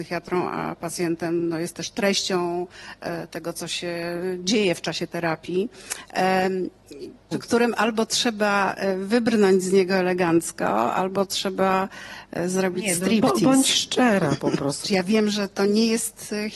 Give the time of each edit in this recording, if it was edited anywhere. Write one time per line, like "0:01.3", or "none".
0:07.3
0:14.8